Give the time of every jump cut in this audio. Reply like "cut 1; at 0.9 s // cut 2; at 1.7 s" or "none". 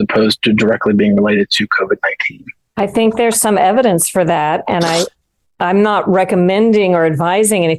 none